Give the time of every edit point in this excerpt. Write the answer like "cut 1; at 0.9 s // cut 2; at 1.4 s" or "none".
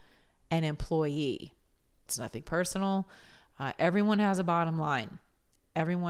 cut 1; at 2.1 s